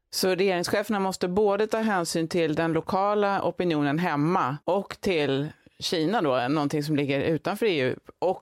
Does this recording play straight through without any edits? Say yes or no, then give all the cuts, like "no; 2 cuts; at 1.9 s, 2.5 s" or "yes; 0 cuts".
no; 1 cut; at 4.6 s